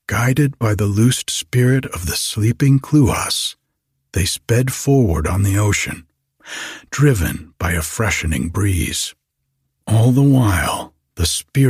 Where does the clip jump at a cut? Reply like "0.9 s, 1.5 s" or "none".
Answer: none

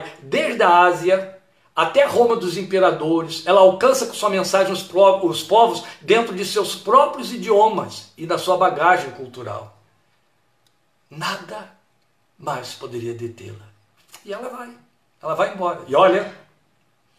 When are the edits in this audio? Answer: none

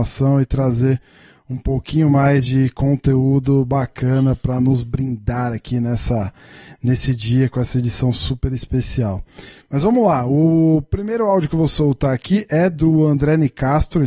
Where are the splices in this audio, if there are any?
9.6 s

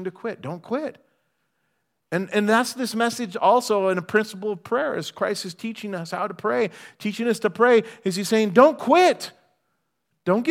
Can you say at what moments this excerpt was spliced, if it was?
none

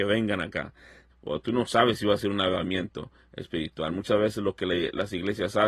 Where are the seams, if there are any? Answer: 1.1 s

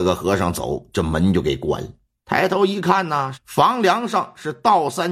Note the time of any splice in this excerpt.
2.2 s, 3.3 s

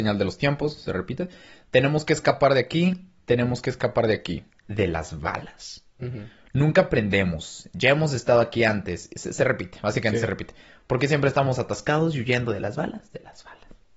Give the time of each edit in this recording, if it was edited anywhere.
4.5 s

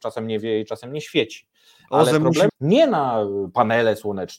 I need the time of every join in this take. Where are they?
2.5 s

